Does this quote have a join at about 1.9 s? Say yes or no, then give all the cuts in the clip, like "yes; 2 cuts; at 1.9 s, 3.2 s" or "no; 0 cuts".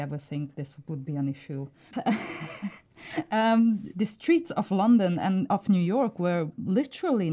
yes; 1 cut; at 1.9 s